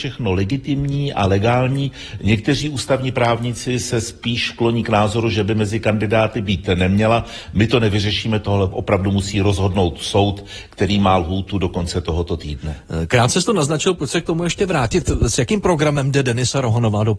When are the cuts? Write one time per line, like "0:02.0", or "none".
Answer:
none